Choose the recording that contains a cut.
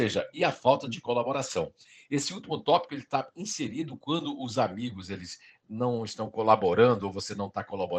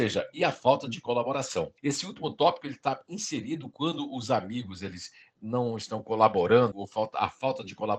second; 2 cuts; at 1.8 s, 6.7 s

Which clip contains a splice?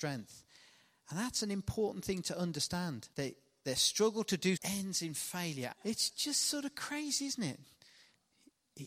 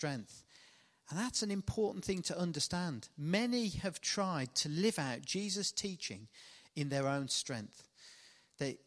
first; 3 cuts; at 3.1 s, 4.6 s, 5.7 s

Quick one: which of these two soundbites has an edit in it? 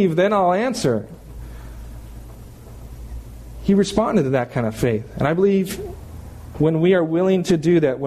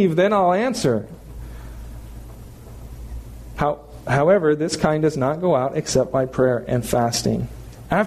second; 1 cut; at 3.5 s

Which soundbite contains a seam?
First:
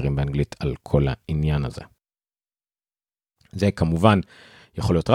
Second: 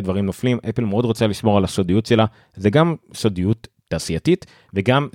first; 1 cut; at 3.4 s

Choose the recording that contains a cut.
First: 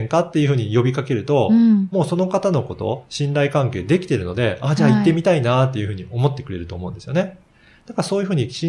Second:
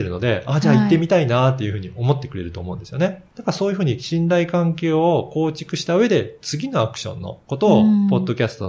second; 1 cut; at 3.3 s

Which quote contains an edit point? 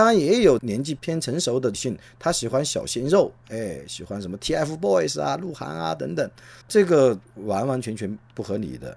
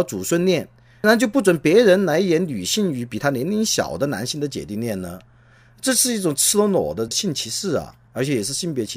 first; 1 cut; at 6.6 s

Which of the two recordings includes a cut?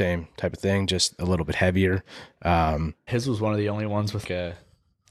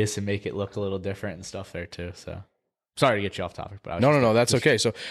first; 2 cuts; at 3.1 s, 4.2 s

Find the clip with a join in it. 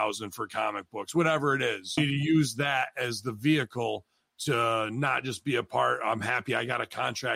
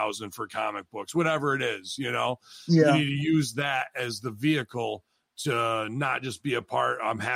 first; 1 cut; at 2.0 s

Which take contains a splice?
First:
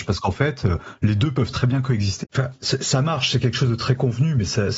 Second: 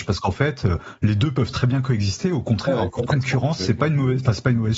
first; 1 cut; at 2.2 s

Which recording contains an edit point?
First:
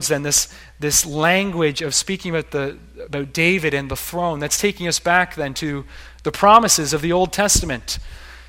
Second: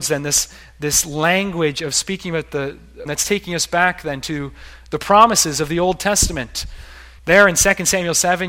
second; 2 cuts; at 3.1 s, 7.2 s

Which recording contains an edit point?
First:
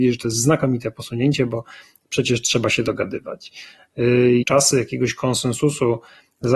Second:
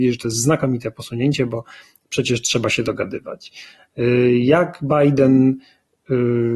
first; 1 cut; at 4.4 s

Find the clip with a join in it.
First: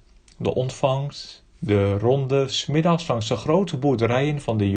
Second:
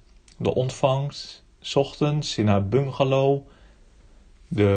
first; 1 cut; at 1.5 s

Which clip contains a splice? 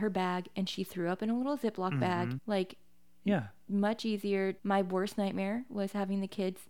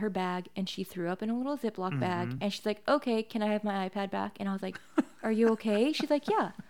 first; 2 cuts; at 2.4 s, 4.6 s

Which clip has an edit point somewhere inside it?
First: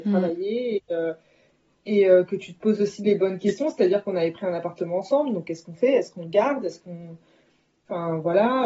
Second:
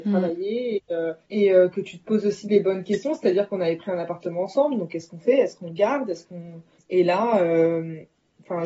second; 2 cuts; at 1.2 s, 6.8 s

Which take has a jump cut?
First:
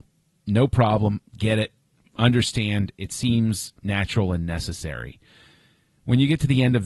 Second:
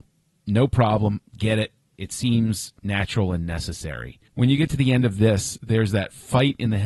second; 2 cuts; at 2.0 s, 4.3 s

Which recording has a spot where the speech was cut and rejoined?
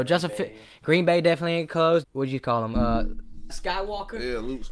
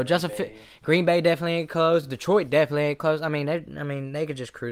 first; 2 cuts; at 2.0 s, 3.5 s

